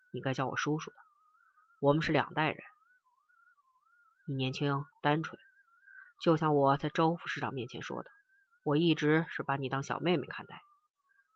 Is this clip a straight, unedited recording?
no; 1 cut; at 4.9 s

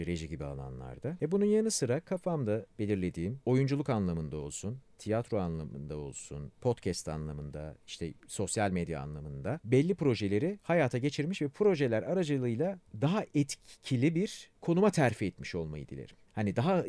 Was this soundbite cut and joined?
no; 0 cuts

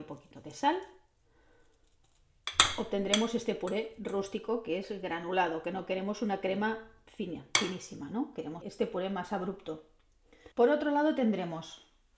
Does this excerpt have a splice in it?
yes; 2 cuts; at 8.6 s, 10.5 s

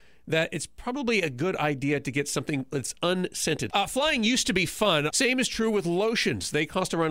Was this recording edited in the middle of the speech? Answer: yes; 2 cuts; at 3.7 s, 5.1 s

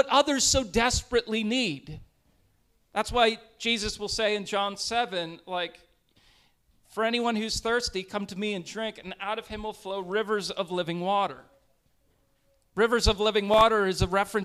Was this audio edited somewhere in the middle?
no; 0 cuts

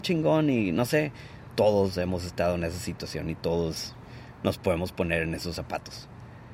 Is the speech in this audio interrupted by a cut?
yes; 1 cut; at 1.5 s

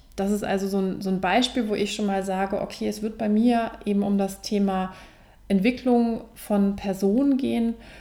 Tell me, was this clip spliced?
no; 0 cuts

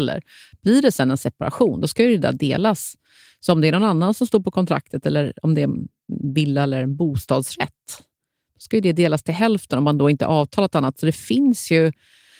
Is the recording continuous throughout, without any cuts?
yes; 0 cuts

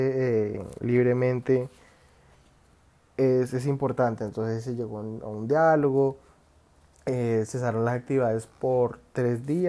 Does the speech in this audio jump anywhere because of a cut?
no; 0 cuts

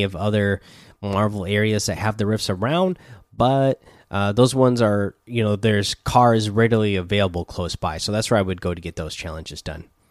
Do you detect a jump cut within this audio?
no; 0 cuts

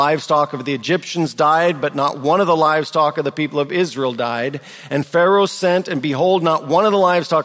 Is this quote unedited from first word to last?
yes; 0 cuts

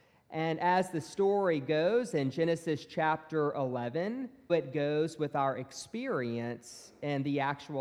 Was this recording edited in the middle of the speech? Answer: yes; 1 cut; at 4.5 s

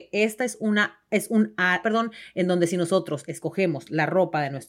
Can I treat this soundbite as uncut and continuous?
no; 1 cut; at 1.8 s

